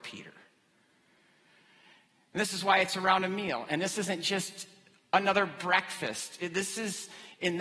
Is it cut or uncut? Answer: uncut